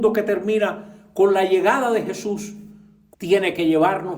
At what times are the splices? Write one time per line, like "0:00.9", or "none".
0:03.1